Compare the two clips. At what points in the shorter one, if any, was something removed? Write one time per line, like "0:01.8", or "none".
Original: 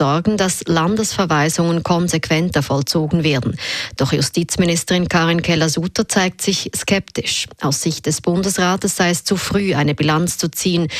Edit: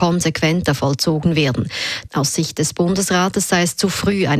0:02.1